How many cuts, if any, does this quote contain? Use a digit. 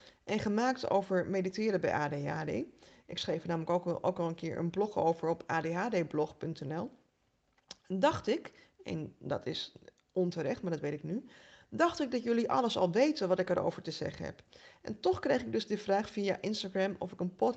0